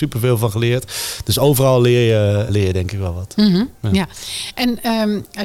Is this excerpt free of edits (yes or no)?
no